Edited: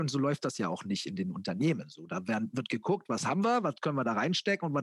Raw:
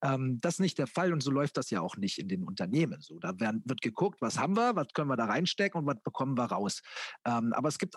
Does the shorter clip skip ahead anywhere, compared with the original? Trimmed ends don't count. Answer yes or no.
no